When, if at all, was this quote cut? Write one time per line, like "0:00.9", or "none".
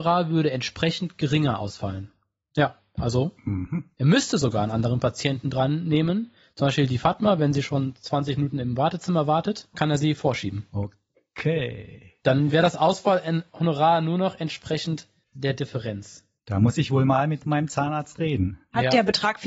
0:09.7